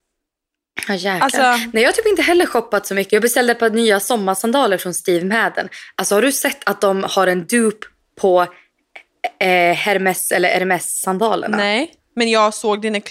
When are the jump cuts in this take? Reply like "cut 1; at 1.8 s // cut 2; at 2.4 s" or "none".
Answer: cut 1; at 3.1 s